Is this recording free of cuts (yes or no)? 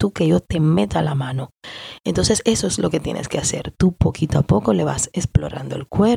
yes